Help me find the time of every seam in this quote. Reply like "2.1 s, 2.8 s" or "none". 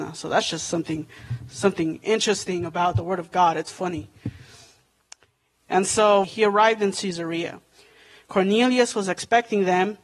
6.2 s